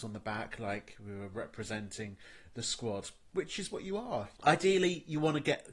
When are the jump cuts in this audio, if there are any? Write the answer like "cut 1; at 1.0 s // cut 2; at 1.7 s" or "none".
cut 1; at 4.4 s